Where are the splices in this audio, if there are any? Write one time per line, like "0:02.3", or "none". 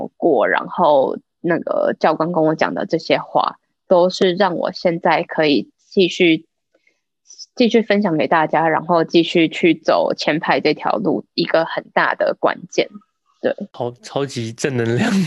none